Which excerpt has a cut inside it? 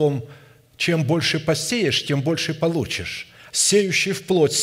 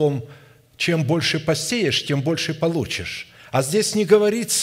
first; 1 cut; at 3.5 s

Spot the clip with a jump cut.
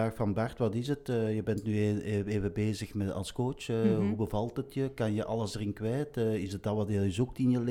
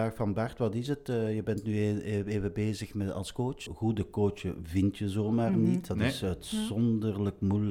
second; 1 cut; at 3.7 s

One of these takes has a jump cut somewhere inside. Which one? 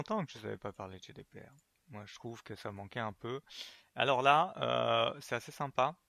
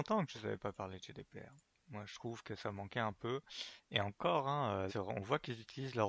second; 2 cuts; at 3.8 s, 4.9 s

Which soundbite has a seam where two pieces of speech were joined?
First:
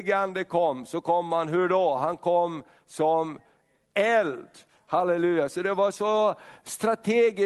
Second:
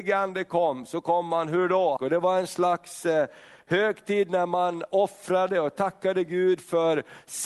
second; 1 cut; at 2.0 s

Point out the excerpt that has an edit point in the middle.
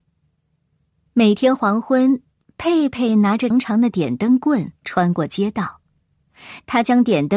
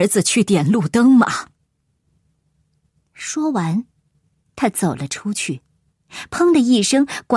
first; 2 cuts; at 3.5 s, 4.8 s

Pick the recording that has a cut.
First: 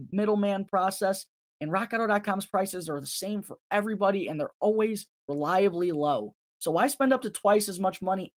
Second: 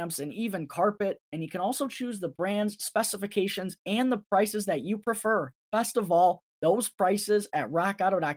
first; 1 cut; at 6.5 s

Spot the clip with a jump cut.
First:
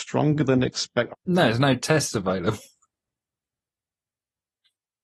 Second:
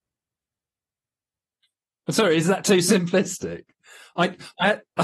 first; 1 cut; at 1.1 s

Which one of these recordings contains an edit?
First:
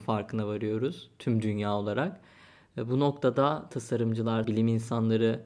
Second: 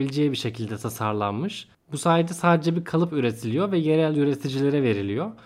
first; 1 cut; at 4.4 s

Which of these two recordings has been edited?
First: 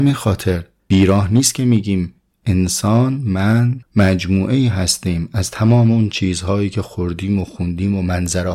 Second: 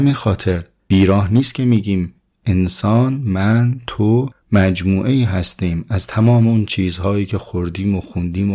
first; 1 cut; at 3.8 s

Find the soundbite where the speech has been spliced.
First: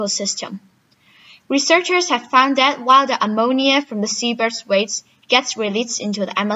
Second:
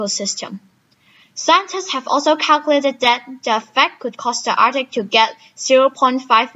second; 1 cut; at 1.2 s

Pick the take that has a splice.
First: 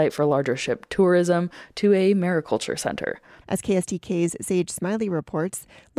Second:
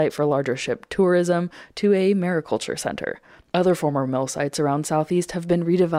first; 1 cut; at 3.4 s

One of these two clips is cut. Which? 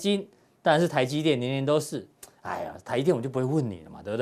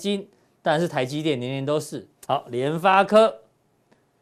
second; 1 cut; at 2.2 s

